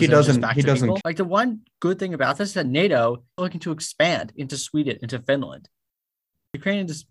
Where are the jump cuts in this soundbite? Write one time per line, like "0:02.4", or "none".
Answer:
0:01.0
0:03.4